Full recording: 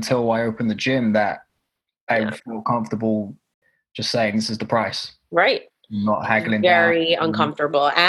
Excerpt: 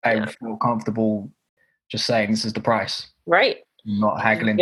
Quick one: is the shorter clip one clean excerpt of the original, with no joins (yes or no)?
yes